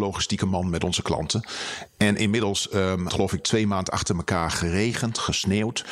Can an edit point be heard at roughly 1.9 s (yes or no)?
no